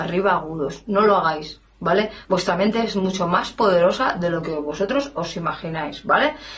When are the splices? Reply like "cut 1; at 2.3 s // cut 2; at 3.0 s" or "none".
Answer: none